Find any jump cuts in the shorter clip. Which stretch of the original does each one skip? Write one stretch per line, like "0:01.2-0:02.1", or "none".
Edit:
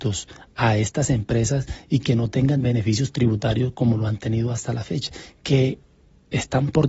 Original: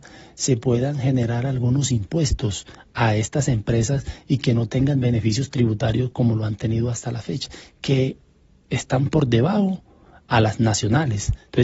none